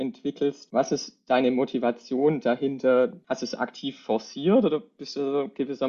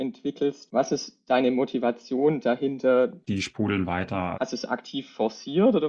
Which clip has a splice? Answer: second; 2 cuts; at 3.2 s, 4.3 s

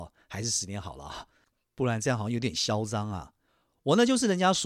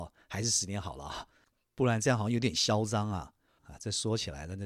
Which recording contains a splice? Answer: second; 1 cut; at 3.6 s

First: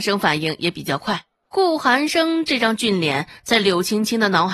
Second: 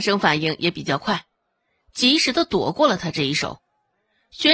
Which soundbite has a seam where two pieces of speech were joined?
first; 1 cut; at 1.4 s

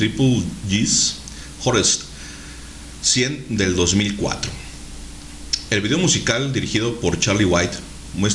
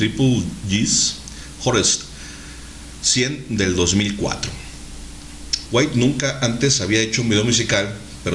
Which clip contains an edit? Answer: second; 1 cut; at 5.7 s

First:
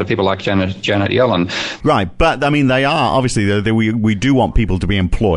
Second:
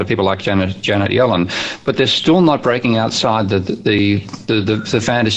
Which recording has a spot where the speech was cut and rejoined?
first; 1 cut; at 1.8 s

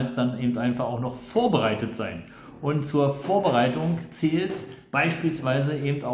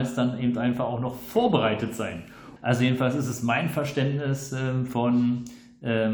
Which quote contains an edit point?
second; 1 cut; at 2.6 s

